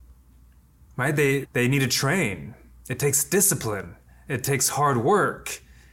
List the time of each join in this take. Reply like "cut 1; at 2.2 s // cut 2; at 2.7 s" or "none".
cut 1; at 1.4 s